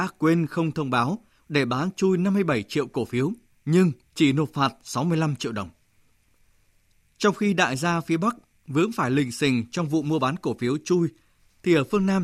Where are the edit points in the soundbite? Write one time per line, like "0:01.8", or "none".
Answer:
0:03.5